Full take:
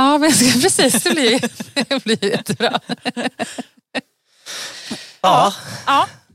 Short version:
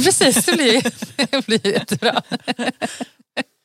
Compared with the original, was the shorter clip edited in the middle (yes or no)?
no